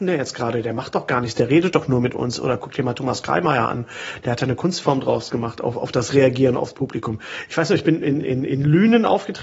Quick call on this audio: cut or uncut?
uncut